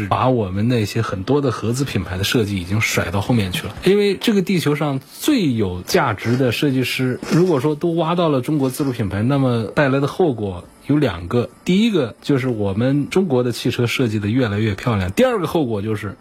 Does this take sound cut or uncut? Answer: uncut